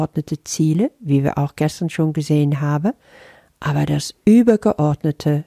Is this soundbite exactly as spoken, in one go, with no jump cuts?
yes; 0 cuts

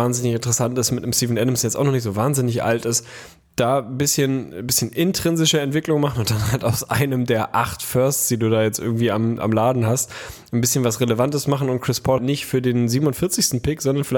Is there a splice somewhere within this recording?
yes; 1 cut; at 12.2 s

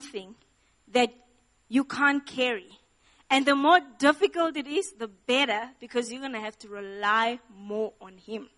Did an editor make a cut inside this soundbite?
no; 0 cuts

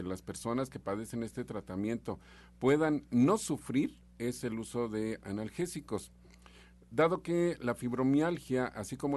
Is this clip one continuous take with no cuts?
yes; 0 cuts

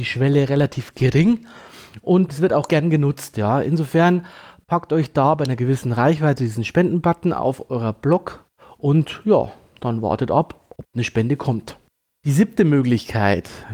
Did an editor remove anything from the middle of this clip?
yes; 1 cut; at 2.3 s

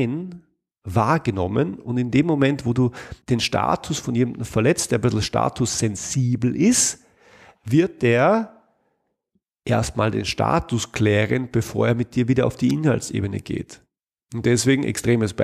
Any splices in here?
yes; 1 cut; at 3.2 s

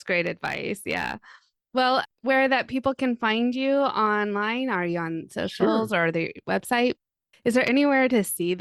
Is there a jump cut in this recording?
yes; 1 cut; at 7.3 s

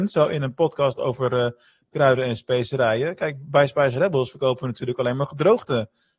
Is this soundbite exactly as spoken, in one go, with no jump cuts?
yes; 0 cuts

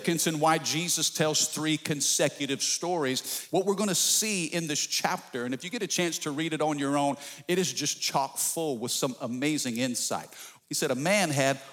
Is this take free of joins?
no; 2 cuts; at 3.5 s, 10.6 s

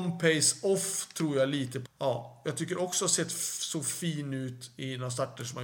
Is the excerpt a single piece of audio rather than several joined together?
no; 1 cut; at 1.8 s

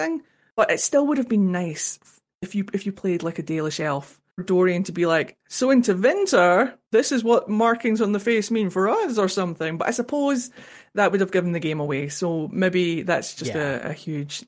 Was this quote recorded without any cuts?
no; 1 cut; at 4.3 s

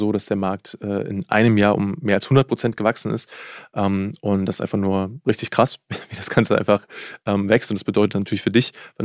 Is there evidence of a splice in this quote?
no; 0 cuts

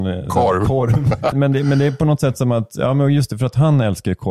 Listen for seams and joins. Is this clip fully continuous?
no; 1 cut; at 1.3 s

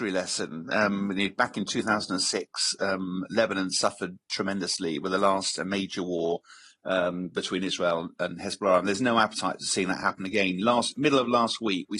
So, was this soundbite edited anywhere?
no; 0 cuts

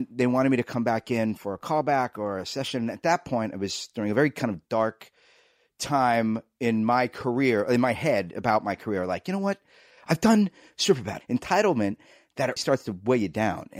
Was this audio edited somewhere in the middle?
yes; 2 cuts; at 11.2 s, 12.6 s

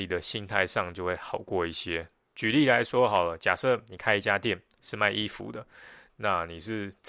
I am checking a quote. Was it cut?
yes; 1 cut; at 2.3 s

